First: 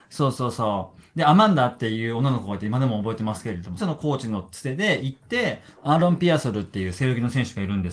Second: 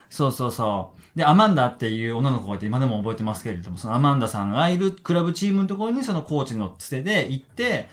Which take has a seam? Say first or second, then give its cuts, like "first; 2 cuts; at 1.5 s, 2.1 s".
first; 2 cuts; at 3.8 s, 5.8 s